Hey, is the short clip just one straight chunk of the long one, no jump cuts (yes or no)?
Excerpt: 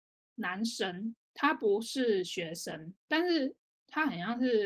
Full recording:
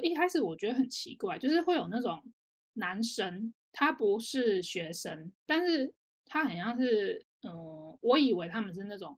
yes